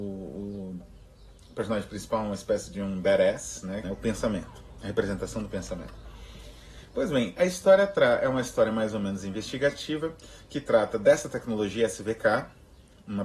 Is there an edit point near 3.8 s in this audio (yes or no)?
yes